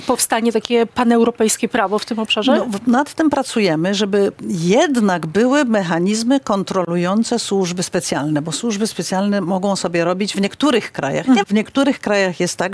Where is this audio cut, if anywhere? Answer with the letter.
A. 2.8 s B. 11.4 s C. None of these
B